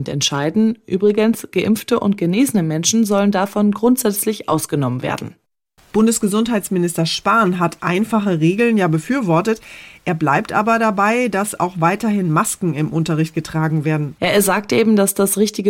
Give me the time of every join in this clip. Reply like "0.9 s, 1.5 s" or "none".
14.2 s

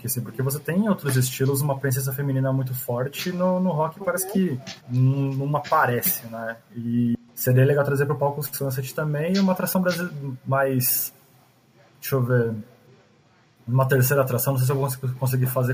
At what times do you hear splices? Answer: 4.8 s

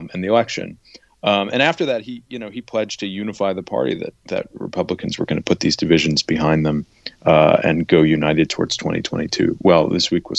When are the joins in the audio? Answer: none

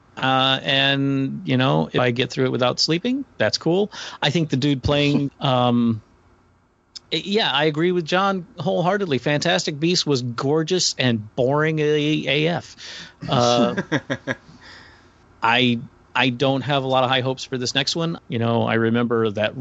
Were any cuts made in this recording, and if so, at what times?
5.3 s, 18.2 s

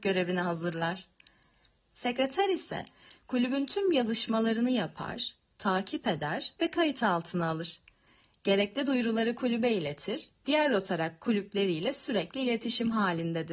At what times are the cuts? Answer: none

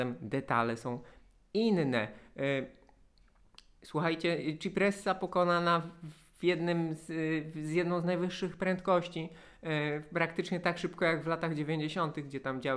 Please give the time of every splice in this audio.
none

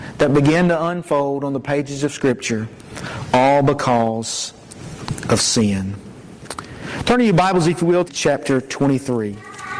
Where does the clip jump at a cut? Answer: 8.1 s

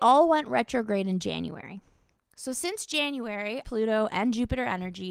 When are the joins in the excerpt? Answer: 3.6 s

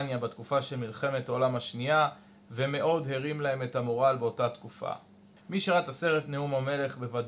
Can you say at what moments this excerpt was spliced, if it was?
5.4 s

